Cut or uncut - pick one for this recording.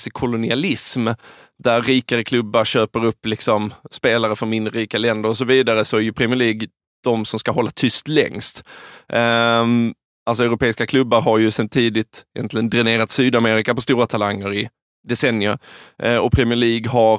uncut